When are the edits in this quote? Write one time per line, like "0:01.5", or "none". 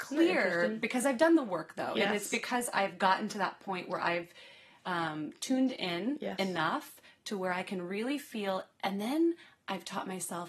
none